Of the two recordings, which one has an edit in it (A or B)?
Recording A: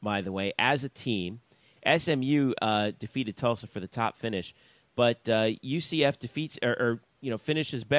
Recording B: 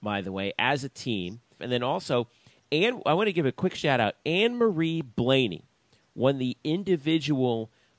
B